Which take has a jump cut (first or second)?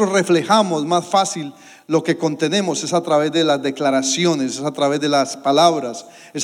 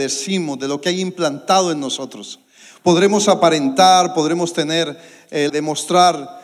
second